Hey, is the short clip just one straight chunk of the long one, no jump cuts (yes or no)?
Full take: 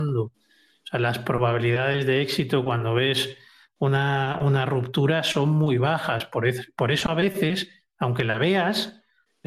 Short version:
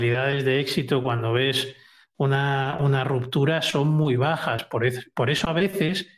yes